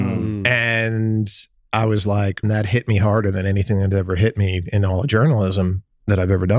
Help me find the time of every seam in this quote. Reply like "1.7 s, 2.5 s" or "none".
2.4 s